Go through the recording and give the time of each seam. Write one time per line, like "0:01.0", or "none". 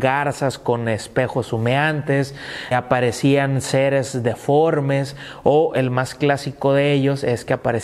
0:02.7